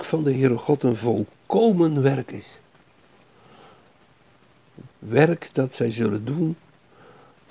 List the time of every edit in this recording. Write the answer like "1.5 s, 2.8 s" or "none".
4.9 s